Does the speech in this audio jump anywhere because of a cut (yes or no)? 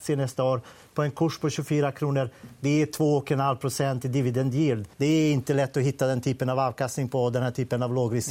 yes